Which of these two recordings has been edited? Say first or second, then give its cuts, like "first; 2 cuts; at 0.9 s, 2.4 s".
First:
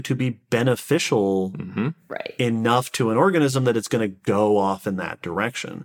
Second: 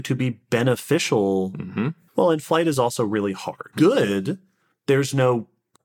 second; 2 cuts; at 2.1 s, 3.7 s